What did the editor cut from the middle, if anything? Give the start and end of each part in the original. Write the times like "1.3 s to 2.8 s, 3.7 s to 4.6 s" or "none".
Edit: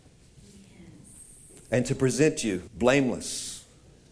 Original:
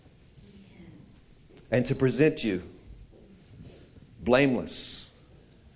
2.7 s to 4.1 s